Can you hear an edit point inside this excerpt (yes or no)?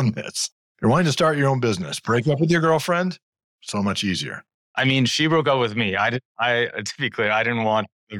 no